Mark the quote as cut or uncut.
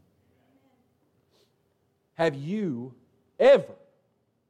cut